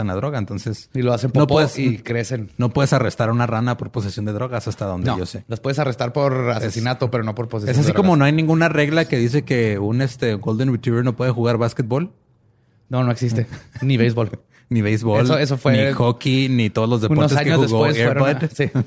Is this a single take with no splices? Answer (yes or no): yes